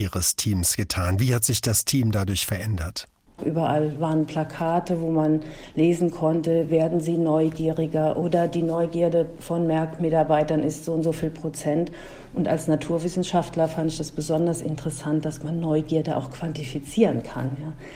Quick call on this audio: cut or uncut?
cut